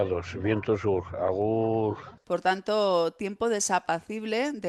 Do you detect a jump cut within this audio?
yes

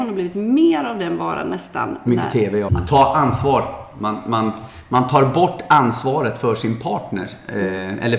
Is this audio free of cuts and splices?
no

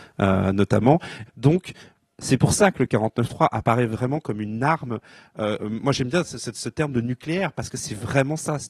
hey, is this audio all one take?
no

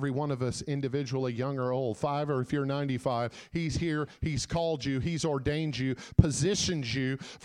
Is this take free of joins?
yes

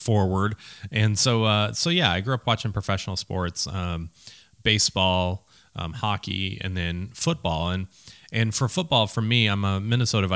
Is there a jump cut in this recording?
no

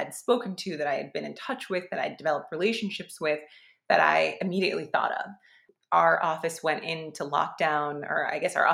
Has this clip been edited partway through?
no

